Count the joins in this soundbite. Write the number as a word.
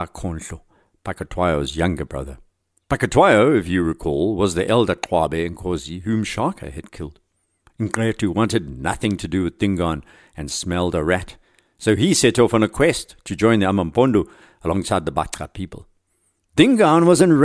zero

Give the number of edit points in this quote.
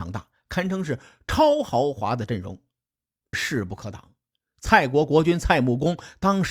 one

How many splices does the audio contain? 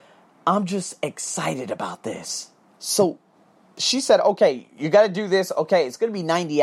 one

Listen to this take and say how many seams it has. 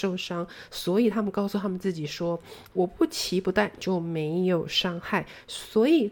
one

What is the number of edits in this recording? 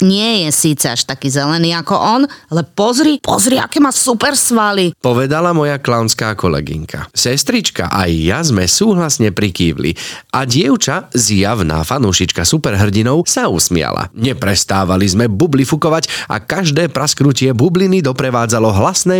zero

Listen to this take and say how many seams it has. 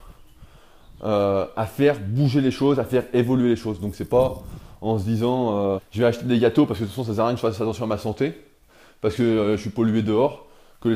one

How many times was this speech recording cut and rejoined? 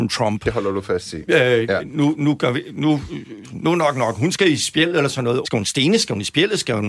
one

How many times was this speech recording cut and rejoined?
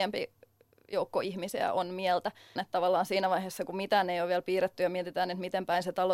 one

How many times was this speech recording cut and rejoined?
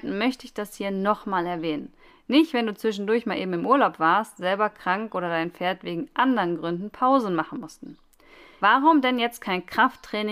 two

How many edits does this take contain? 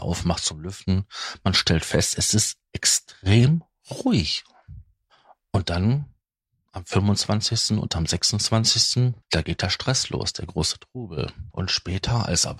two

